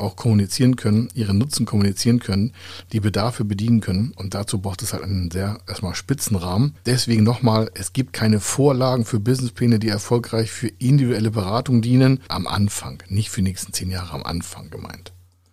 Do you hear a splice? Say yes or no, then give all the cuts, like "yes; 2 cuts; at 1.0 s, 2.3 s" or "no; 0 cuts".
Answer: yes; 2 cuts; at 6.8 s, 12.3 s